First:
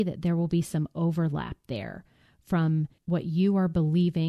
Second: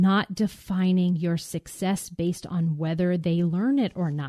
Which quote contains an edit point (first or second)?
first